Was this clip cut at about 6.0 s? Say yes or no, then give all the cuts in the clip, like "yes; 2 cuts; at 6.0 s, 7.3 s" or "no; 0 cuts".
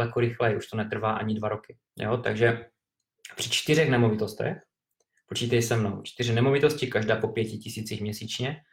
no; 1 cut; at 1.9 s